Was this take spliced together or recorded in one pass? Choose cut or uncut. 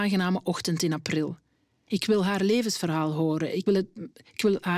cut